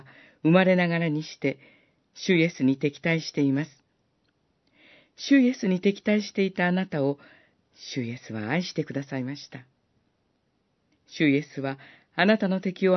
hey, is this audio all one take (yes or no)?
no